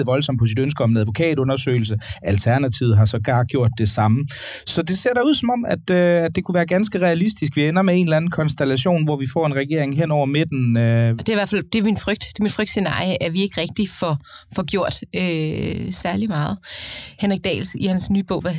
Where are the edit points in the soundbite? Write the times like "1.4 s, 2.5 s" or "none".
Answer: 11.2 s